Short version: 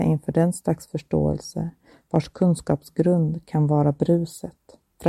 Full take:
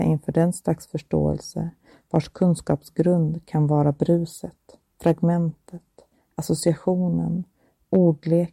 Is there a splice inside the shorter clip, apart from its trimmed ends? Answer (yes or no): no